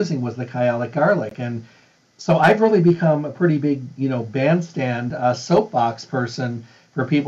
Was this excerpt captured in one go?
yes; 0 cuts

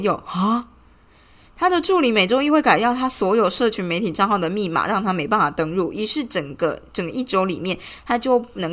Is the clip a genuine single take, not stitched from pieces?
yes; 0 cuts

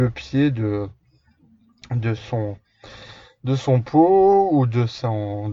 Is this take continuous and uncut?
yes; 0 cuts

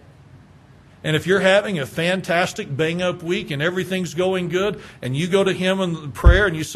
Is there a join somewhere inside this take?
no; 0 cuts

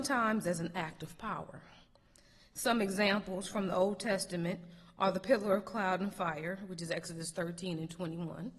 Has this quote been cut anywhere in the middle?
no; 0 cuts

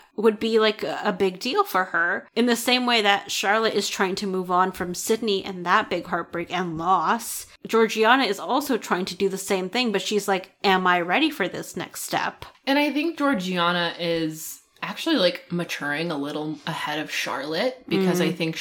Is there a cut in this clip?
no; 0 cuts

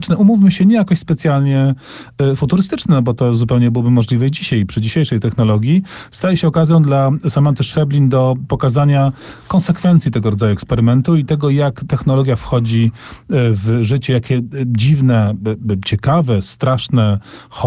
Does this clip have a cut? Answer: no; 0 cuts

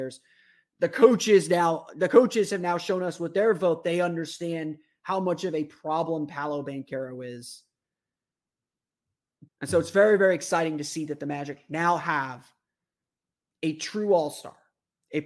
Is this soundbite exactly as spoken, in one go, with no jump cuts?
no; 1 cut; at 9.5 s

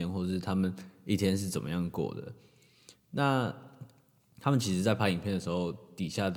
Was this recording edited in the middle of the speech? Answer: no; 0 cuts

